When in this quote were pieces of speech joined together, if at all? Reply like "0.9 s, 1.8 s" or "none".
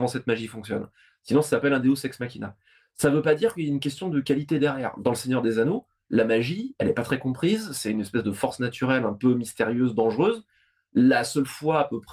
none

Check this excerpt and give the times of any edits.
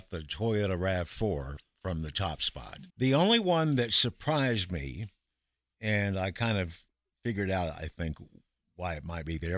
2.9 s

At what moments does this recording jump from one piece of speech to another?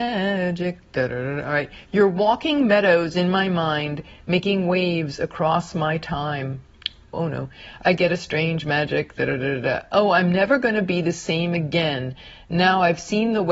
7.1 s

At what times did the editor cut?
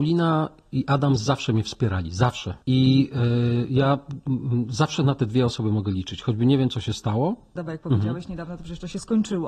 2.6 s, 7.6 s

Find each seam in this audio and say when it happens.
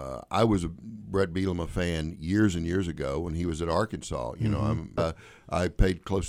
5.0 s

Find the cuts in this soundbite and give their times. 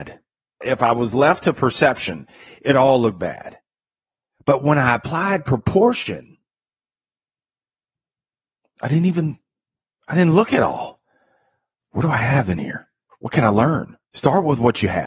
14.0 s

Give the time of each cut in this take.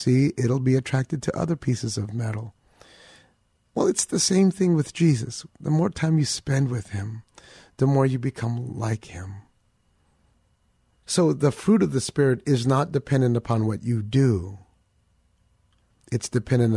11.0 s

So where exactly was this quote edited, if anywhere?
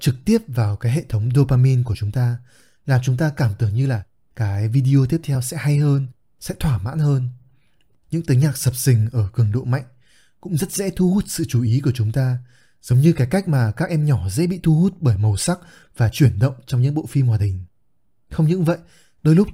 7.9 s

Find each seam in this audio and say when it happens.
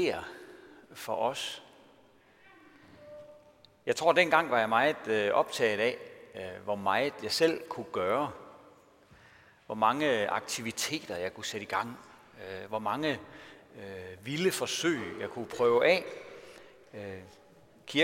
none

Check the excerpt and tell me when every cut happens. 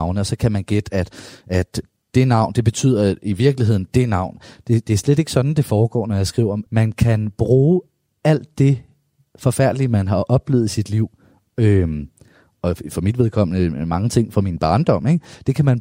6.7 s

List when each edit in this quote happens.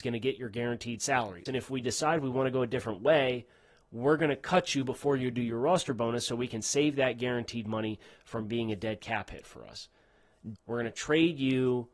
1.5 s, 10.6 s

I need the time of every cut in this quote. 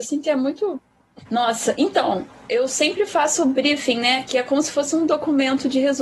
1.2 s

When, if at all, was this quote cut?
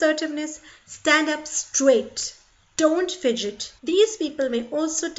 3.8 s

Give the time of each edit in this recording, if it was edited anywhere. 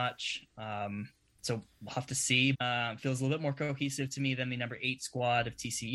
2.5 s

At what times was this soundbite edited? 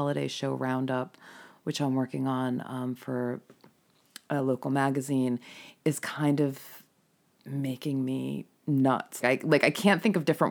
9.2 s

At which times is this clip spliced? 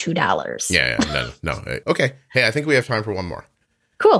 1.8 s

